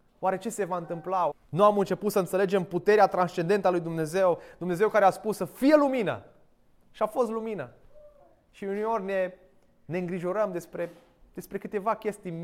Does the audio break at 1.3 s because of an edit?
yes; 1 cut; at 1.3 s

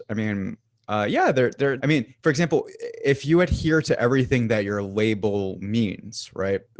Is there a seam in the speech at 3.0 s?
no; 1 cut; at 1.8 s

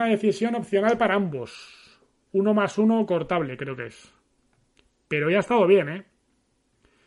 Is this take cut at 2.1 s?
no; 0 cuts

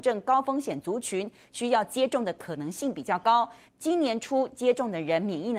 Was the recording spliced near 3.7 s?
yes; 1 cut; at 3.7 s

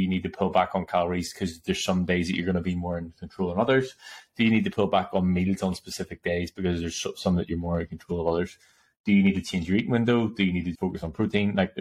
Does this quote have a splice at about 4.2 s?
no; 1 cut; at 10.7 s

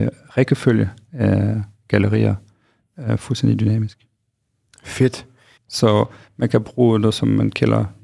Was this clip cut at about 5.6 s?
yes; 1 cut; at 5.6 s

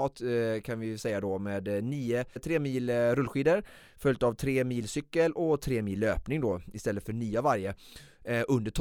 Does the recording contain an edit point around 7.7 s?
no; 1 cut; at 2.4 s

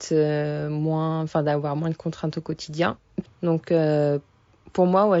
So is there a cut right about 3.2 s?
yes; 1 cut; at 3.2 s

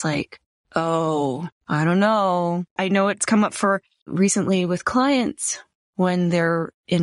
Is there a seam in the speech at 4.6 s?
no; 1 cut; at 2.8 s

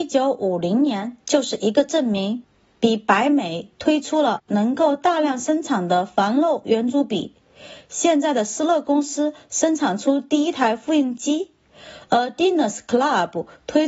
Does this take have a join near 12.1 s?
no; 0 cuts

